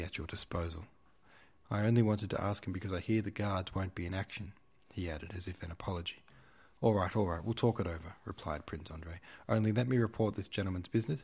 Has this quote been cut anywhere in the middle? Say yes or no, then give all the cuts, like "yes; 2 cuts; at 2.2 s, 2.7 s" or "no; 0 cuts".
yes; 1 cut; at 1.6 s